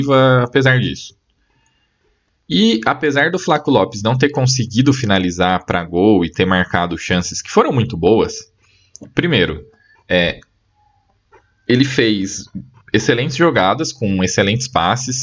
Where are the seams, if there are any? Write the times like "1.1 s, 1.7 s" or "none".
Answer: none